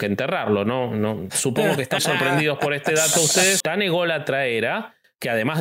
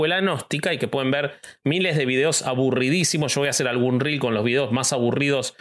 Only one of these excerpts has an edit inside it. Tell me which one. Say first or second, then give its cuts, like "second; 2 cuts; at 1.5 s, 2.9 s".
first; 2 cuts; at 2.0 s, 3.6 s